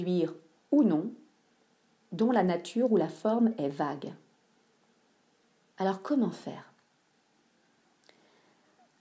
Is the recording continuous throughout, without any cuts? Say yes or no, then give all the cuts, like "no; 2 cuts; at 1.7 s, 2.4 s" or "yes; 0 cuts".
no; 1 cut; at 5.7 s